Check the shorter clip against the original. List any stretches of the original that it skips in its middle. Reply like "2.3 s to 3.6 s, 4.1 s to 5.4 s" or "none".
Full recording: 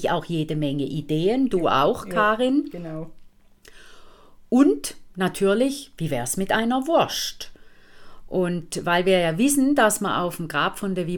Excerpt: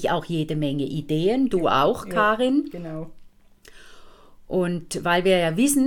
4.5 s to 8.3 s